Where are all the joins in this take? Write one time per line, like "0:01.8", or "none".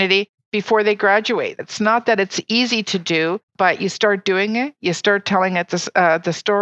0:01.6
0:03.5